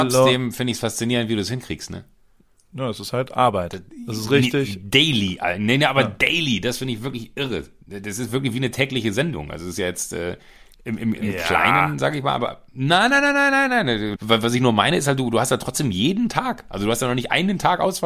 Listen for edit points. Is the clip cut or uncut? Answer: cut